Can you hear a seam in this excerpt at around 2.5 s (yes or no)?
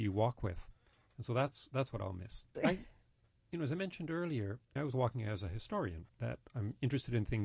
yes